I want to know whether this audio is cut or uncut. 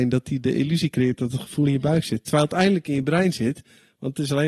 uncut